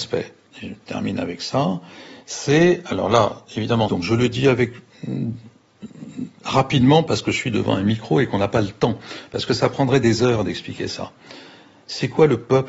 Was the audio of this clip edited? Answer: yes; 1 cut; at 3.9 s

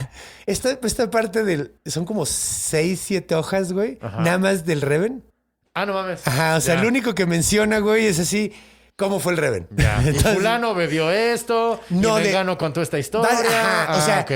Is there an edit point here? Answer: no; 0 cuts

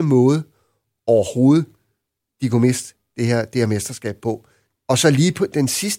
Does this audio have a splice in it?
yes; 1 cut; at 4.7 s

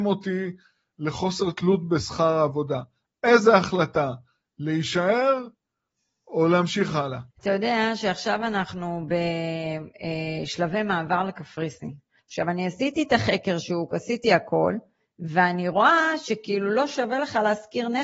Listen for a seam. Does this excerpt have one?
yes; 2 cuts; at 7.3 s, 12.2 s

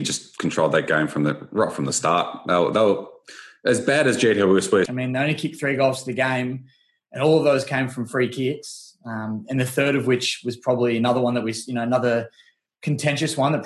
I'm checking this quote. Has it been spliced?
yes; 1 cut; at 4.9 s

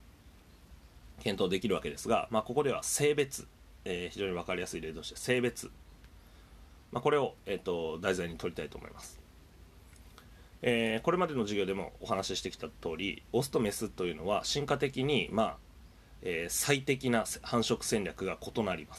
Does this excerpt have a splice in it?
no; 0 cuts

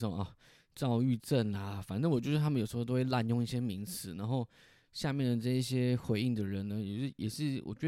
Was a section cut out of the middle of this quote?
no; 0 cuts

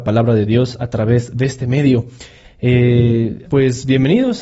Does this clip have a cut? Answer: yes; 1 cut; at 3.5 s

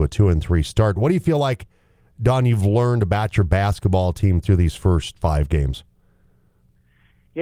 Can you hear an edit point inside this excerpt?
no; 0 cuts

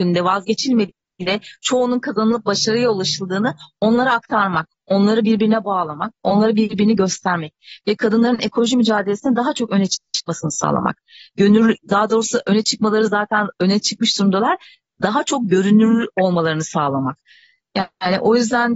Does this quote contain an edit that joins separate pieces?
no; 0 cuts

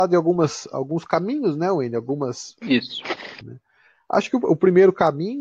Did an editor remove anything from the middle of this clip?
yes; 1 cut; at 3.4 s

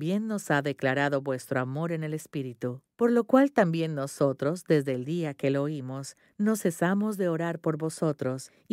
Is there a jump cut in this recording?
no; 0 cuts

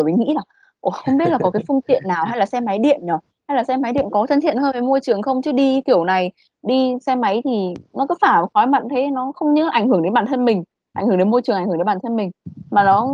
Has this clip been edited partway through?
no; 0 cuts

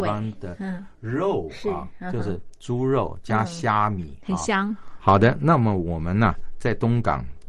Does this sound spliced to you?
yes; 1 cut; at 5.0 s

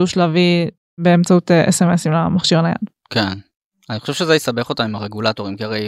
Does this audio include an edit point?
no; 0 cuts

